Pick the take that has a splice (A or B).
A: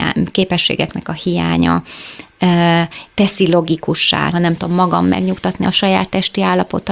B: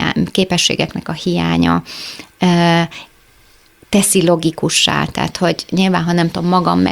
A